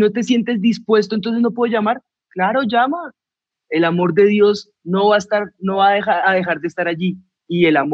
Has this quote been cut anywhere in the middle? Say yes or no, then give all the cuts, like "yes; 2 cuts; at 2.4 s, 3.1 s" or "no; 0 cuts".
yes; 2 cuts; at 3.5 s, 6.2 s